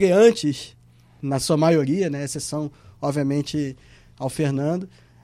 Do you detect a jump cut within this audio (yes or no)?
no